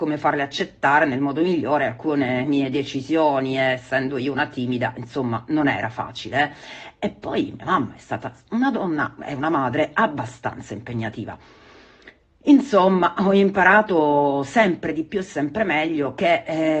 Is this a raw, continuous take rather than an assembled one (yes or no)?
yes